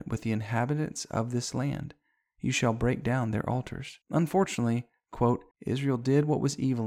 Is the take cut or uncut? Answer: cut